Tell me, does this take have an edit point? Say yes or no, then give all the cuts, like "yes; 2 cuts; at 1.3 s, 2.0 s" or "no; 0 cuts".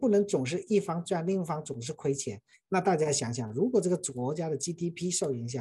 yes; 1 cut; at 2.5 s